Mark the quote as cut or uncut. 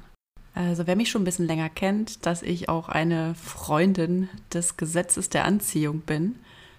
cut